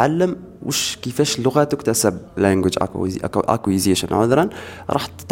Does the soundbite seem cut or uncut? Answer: cut